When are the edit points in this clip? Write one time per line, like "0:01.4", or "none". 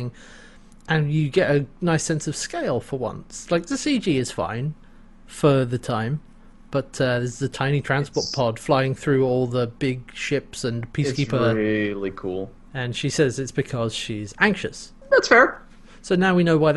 0:12.7